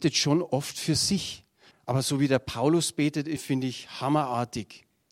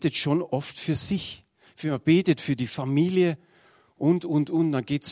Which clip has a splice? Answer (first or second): first